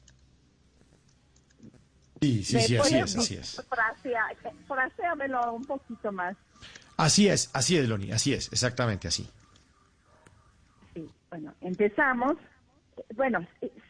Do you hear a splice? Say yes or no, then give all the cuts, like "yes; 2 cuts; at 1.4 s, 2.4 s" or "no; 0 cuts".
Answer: no; 0 cuts